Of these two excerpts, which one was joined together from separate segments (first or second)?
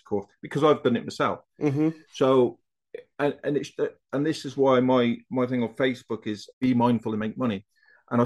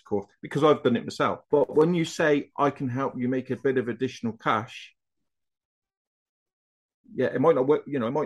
second